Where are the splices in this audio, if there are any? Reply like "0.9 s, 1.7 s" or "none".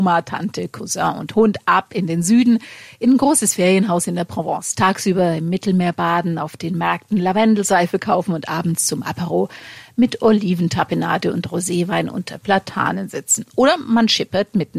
none